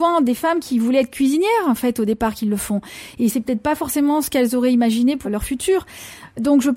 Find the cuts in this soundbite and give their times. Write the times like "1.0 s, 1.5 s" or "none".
5.2 s